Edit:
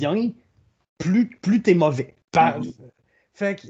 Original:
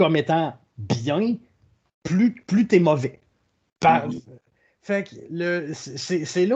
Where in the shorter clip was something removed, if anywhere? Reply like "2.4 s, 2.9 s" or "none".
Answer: 2.2 s